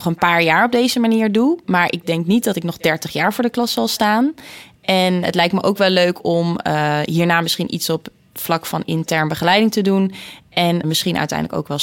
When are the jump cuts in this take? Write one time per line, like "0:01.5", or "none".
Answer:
0:10.8

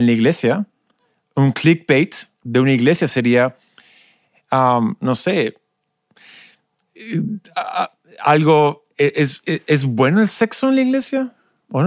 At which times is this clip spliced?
none

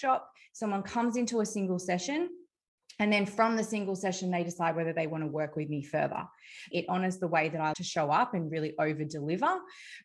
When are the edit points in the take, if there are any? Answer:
0:06.7
0:07.7

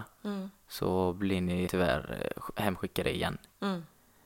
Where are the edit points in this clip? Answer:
0:01.7

